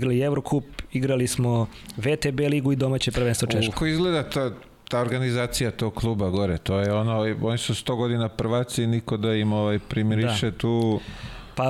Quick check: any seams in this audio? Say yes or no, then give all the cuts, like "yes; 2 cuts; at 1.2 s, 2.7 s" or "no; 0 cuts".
yes; 1 cut; at 3.7 s